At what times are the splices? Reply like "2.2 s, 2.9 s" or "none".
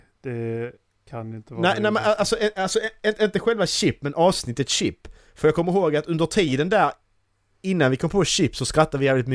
none